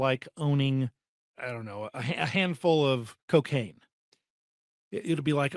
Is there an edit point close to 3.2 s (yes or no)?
yes